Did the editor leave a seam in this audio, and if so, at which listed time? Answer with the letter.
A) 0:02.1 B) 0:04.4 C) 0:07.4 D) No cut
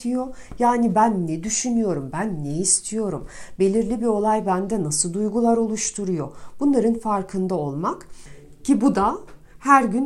A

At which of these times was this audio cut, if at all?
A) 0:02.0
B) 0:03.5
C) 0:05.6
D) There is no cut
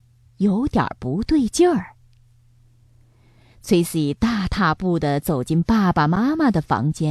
D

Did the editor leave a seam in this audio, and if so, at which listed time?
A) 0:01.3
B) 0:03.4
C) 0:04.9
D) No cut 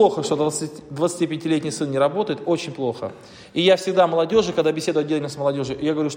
D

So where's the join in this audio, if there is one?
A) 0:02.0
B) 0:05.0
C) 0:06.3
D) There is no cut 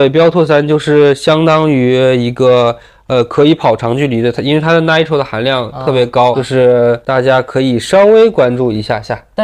C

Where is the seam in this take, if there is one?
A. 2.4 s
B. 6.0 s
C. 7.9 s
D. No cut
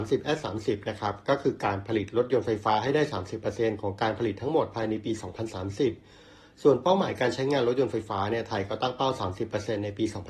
D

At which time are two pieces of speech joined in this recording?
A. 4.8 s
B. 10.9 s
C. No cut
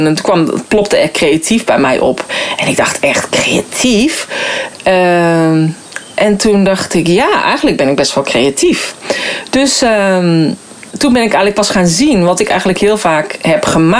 B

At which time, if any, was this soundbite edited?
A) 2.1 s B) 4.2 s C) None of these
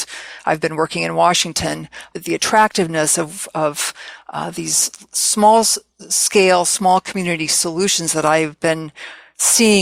C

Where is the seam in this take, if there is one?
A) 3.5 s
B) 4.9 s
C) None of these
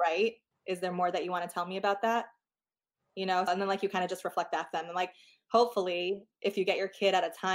A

